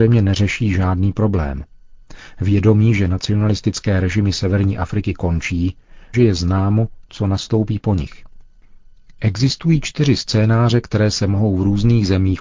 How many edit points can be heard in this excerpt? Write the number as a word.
one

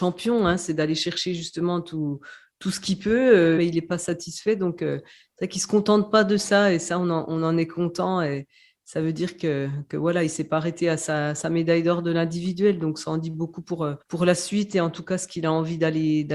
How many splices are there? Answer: two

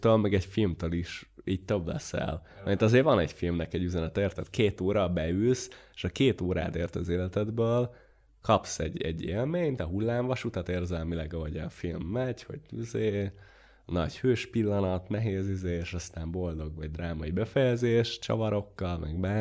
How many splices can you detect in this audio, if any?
one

